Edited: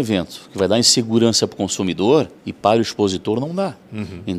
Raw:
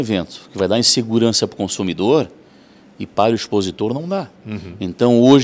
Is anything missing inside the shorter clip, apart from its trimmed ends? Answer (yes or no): yes